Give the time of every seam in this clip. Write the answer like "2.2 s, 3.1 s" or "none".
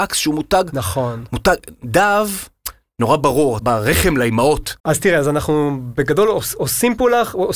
3.6 s, 4.8 s

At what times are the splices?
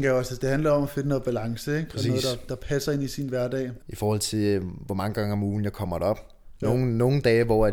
3.8 s

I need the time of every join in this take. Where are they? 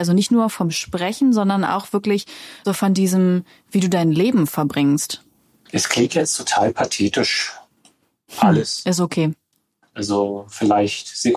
2.6 s, 9.9 s

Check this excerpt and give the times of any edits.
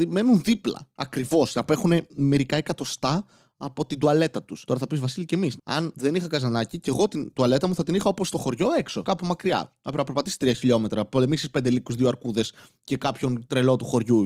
5.6 s

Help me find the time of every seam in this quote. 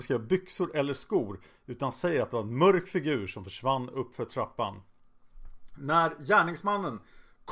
none

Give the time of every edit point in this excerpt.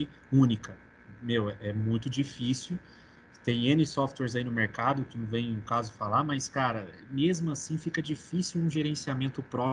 none

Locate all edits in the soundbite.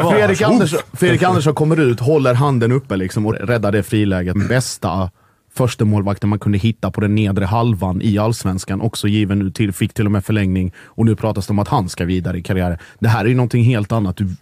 3.3 s, 4.4 s

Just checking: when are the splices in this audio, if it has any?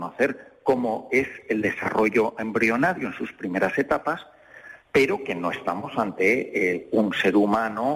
none

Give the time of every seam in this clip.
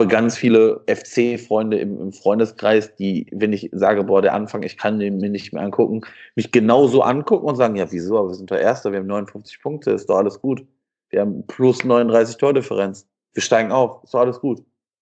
none

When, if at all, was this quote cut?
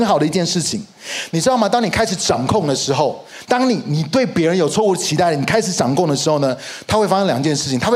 1.3 s

